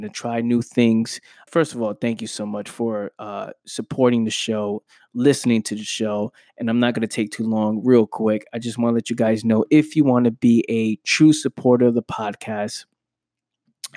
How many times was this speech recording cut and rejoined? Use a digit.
1